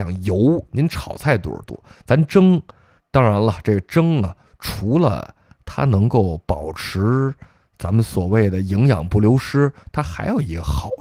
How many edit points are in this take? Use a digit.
1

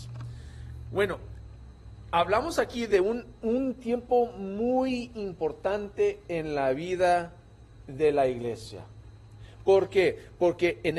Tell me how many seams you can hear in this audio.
0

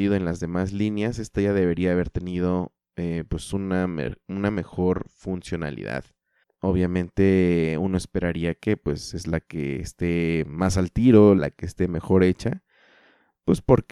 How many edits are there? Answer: 2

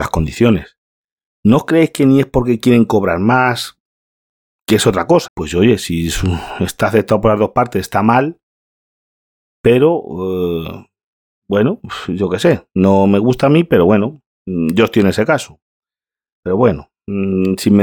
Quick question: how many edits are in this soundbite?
2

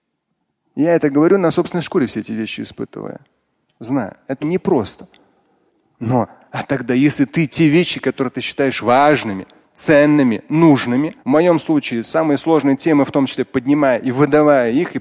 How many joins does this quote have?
2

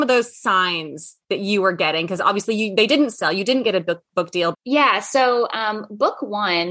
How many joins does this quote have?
1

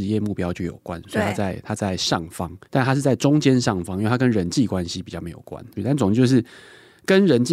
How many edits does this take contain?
2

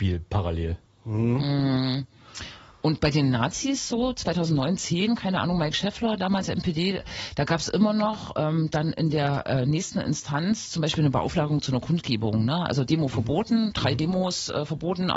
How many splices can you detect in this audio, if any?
0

